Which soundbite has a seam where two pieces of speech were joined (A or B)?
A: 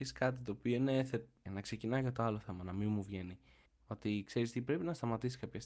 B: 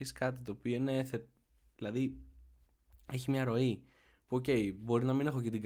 A